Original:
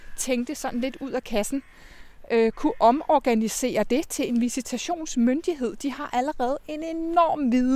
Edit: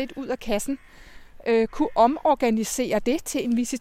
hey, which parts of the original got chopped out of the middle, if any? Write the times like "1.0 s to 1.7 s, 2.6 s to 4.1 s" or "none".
none